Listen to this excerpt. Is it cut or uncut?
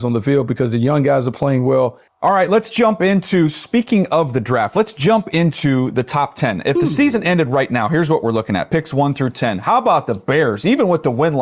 cut